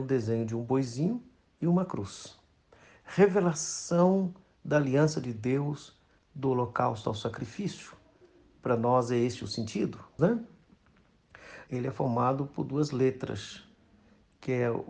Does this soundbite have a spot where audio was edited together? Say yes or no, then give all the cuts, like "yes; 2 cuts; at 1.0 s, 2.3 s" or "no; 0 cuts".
yes; 2 cuts; at 10.2 s, 11.7 s